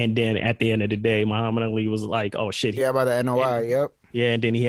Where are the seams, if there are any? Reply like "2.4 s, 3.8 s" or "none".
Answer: 2.7 s